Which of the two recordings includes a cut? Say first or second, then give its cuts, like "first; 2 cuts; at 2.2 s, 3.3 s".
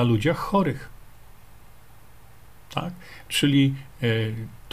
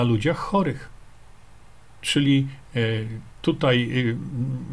second; 1 cut; at 2.0 s